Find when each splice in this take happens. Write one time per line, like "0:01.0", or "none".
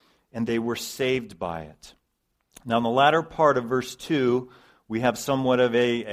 none